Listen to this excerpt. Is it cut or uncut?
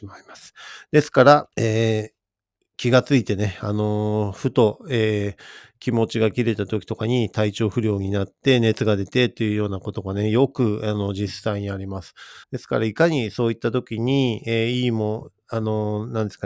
cut